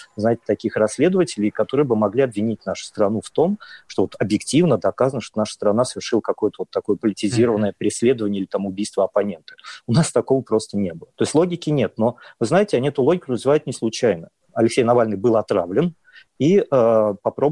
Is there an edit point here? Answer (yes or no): yes